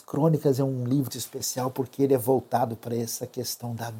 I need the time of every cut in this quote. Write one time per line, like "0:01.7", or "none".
0:01.1